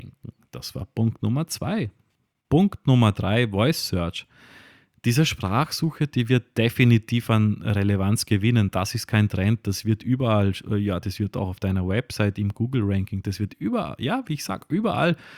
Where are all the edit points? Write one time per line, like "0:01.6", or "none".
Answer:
0:11.0